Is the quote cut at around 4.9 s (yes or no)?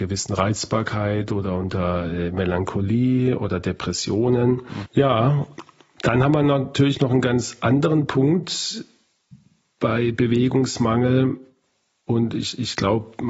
yes